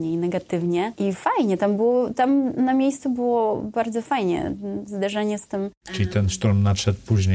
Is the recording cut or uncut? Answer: uncut